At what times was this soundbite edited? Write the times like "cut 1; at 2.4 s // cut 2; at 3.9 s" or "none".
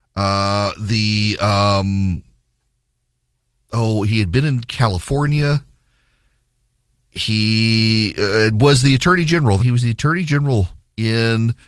cut 1; at 9.6 s

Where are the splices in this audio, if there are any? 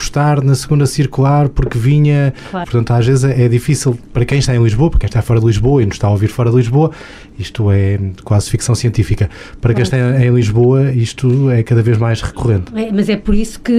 cut 1; at 2.6 s

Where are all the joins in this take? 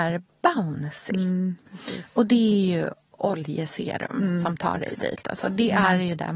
none

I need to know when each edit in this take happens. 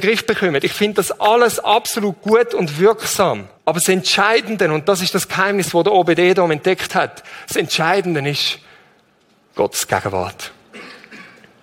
cut 1; at 3.6 s

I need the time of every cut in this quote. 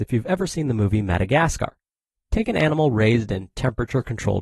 none

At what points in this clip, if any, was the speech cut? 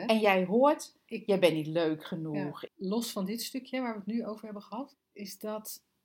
cut 1; at 2.7 s // cut 2; at 4.9 s

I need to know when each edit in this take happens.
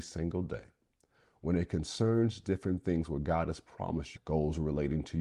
cut 1; at 4.2 s

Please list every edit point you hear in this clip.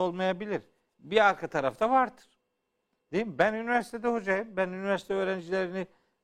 none

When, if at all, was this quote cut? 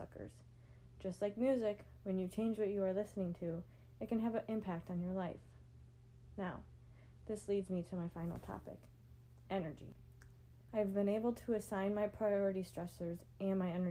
cut 1; at 10.7 s

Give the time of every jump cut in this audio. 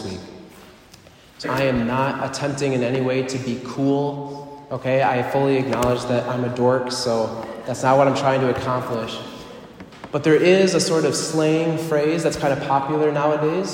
cut 1; at 1.4 s

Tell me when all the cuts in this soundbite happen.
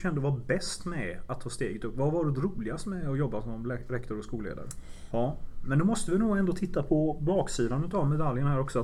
cut 1; at 5.1 s

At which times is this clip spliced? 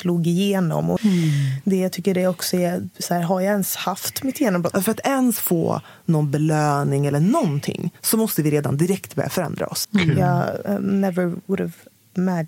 cut 1; at 1.0 s // cut 2; at 4.7 s // cut 3; at 9.8 s

